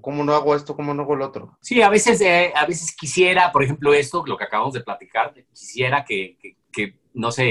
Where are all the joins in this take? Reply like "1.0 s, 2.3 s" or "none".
1.6 s, 6.5 s